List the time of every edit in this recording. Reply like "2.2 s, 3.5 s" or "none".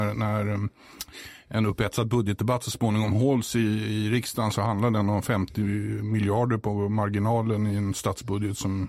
none